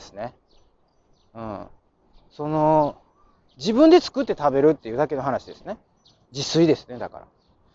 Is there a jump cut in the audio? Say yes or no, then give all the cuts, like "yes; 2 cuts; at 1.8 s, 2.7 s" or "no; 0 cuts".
no; 0 cuts